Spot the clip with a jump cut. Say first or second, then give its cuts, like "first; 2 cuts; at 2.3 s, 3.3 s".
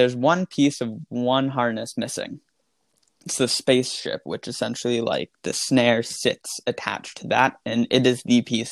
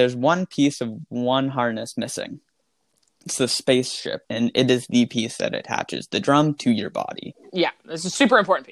second; 1 cut; at 4.2 s